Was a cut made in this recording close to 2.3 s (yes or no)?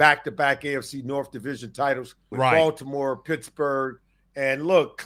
yes